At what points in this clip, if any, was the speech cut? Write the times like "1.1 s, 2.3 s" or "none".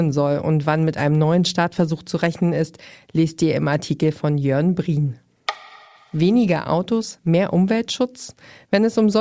none